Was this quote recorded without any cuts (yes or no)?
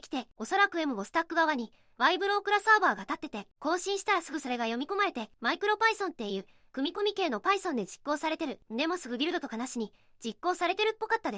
yes